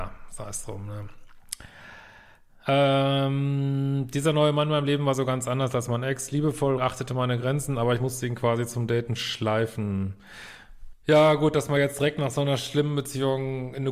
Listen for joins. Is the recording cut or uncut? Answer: cut